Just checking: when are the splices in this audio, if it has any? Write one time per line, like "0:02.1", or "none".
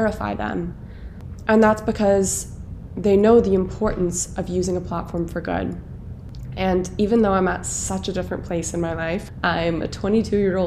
none